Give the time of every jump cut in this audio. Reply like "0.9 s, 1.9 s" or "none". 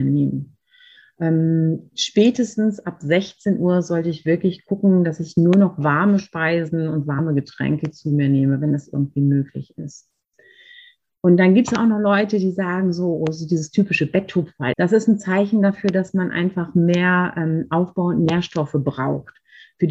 14.7 s

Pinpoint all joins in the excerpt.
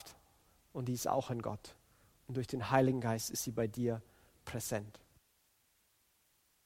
none

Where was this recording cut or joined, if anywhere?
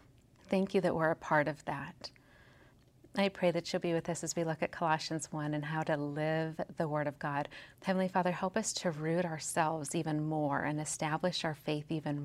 7.7 s

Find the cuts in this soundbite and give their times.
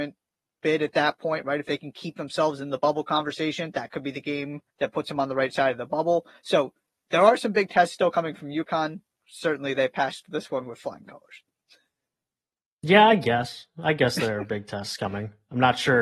4.7 s

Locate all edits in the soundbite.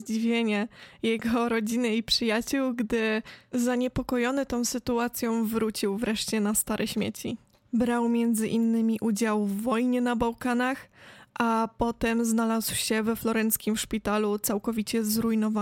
7.6 s

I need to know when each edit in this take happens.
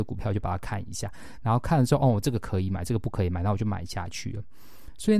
none

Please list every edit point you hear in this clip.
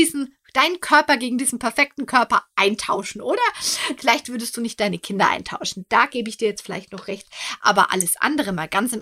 4.0 s

